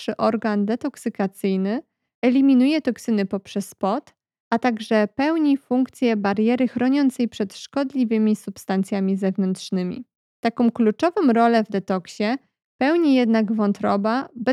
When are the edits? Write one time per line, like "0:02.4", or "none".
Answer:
none